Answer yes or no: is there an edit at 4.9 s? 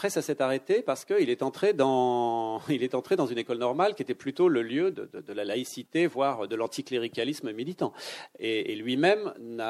yes